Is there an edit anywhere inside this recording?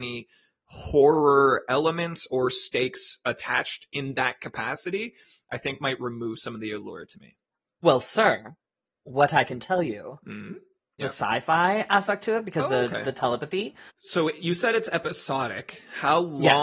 yes; 2 cuts; at 11.0 s, 13.9 s

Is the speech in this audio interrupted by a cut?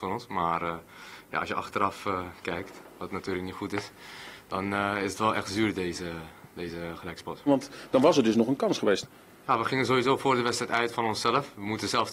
yes; 1 cut; at 7.5 s

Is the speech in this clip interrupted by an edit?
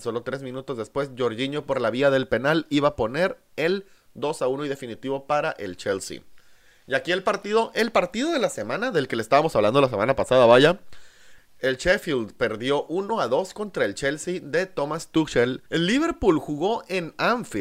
yes; 2 cuts; at 11.4 s, 15.7 s

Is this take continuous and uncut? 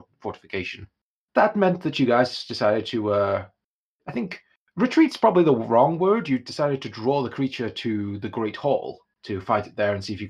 yes; 0 cuts

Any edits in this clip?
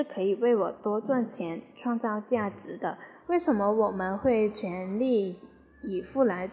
yes; 1 cut; at 3.2 s

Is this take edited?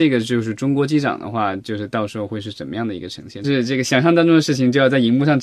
yes; 1 cut; at 3.4 s

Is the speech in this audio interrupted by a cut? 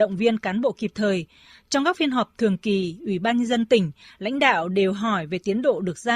no; 0 cuts

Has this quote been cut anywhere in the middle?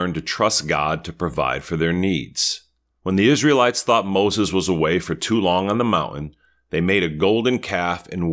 yes; 1 cut; at 3.0 s

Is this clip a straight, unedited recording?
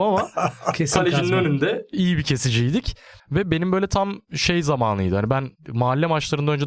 no; 1 cut; at 3.2 s

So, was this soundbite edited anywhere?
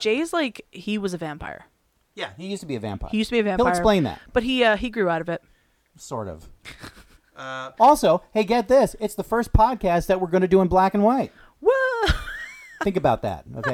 yes; 1 cut; at 7.8 s

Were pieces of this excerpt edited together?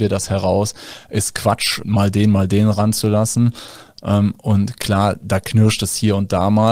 yes; 1 cut; at 1.8 s

